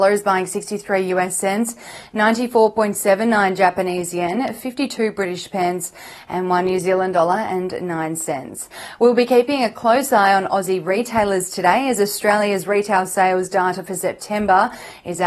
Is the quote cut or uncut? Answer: uncut